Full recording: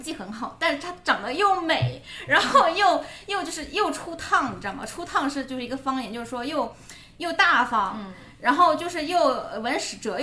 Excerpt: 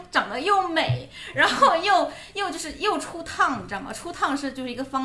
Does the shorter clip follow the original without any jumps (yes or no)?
yes